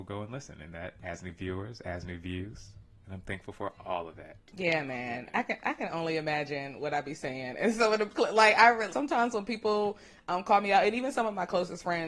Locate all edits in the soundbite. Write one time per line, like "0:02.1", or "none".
0:08.9